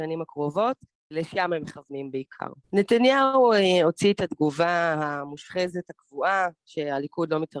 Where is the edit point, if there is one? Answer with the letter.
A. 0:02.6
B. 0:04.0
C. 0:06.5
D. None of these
A